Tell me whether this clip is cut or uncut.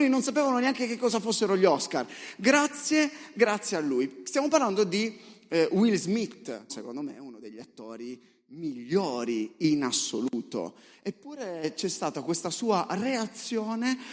cut